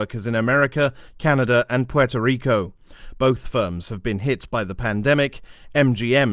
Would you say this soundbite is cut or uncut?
uncut